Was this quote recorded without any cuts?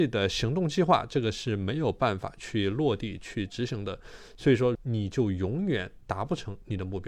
no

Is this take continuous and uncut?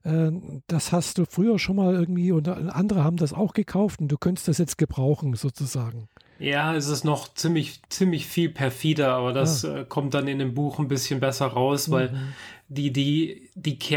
no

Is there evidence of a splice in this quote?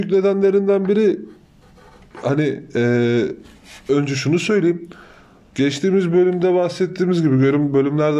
yes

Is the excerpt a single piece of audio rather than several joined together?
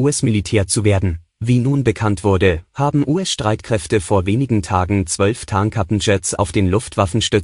no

